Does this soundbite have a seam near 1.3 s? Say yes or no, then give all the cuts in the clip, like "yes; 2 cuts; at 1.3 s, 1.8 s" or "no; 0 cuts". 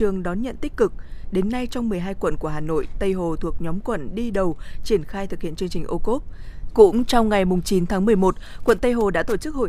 no; 1 cut; at 6.7 s